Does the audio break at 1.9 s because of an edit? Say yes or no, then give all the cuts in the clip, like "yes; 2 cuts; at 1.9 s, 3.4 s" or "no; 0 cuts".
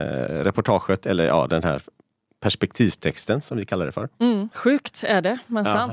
no; 1 cut; at 4.5 s